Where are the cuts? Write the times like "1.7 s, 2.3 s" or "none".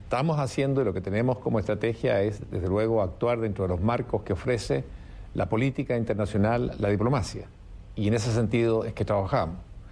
none